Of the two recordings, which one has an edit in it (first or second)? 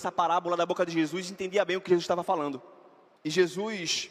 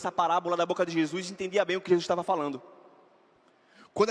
first